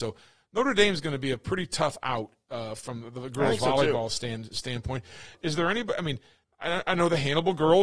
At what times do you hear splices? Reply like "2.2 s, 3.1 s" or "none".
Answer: none